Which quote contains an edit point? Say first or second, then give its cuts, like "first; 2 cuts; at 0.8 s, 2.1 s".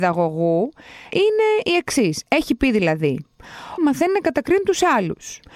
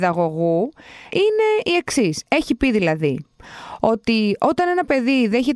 first; 1 cut; at 3.8 s